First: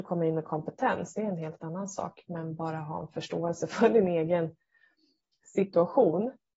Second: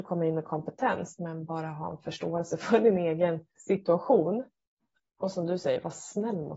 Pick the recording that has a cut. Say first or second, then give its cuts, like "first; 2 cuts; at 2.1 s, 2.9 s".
second; 2 cuts; at 1.2 s, 3.5 s